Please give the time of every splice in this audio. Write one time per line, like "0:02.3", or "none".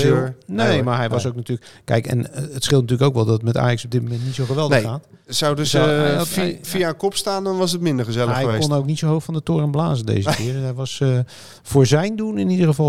none